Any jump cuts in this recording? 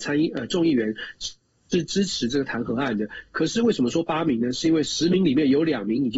no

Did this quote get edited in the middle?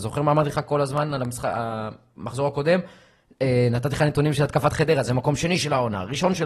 no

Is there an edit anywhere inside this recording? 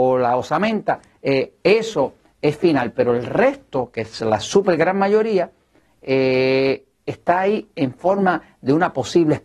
no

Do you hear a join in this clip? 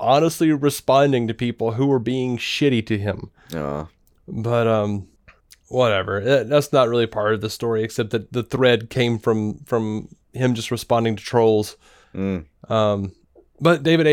no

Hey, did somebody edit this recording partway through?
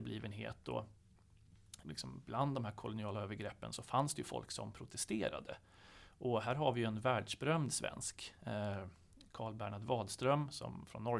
yes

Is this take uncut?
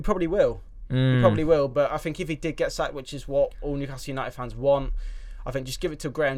yes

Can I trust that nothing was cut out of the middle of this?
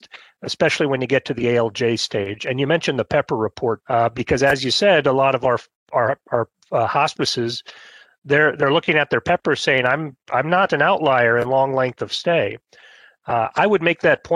no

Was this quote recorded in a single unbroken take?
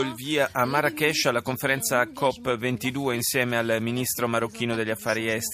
yes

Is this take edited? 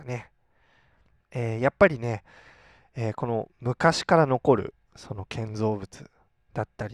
yes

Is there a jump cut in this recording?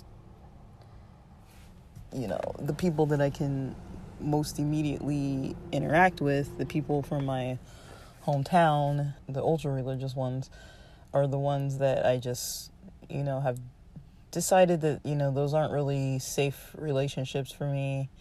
yes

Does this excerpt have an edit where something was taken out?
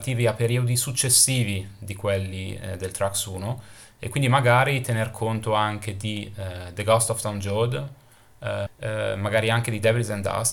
yes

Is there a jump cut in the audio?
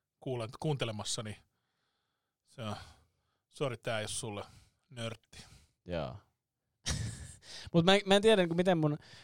no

